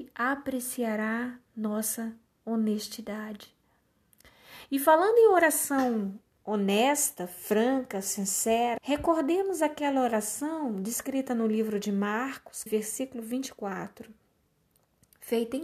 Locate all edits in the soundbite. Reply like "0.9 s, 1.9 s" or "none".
8.8 s, 12.7 s